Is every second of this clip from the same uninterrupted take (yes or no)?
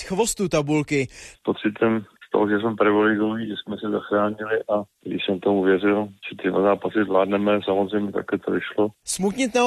no